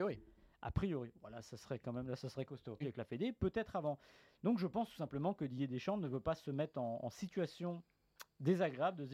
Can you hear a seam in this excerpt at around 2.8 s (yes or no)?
yes